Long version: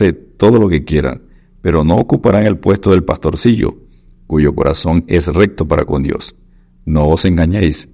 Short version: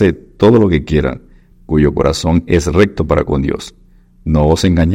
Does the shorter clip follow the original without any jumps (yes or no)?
no